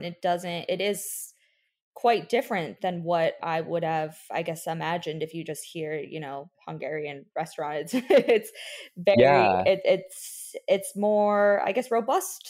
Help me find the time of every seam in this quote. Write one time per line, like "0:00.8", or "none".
none

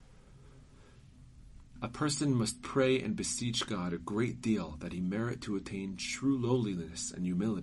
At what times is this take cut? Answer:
0:01.8

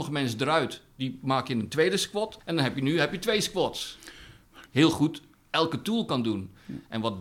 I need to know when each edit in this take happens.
0:02.4
0:04.7

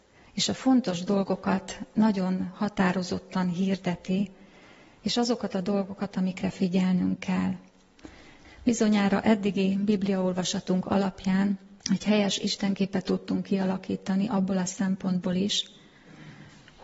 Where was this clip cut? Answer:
0:08.4
0:11.8

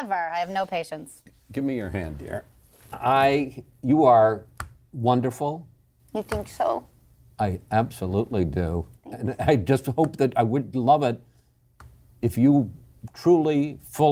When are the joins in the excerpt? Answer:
none

